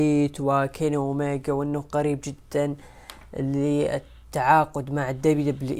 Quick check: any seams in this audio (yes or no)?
no